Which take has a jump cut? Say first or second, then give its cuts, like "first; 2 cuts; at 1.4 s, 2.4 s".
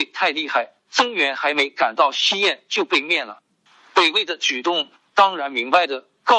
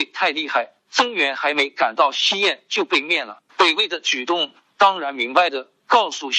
second; 1 cut; at 3.5 s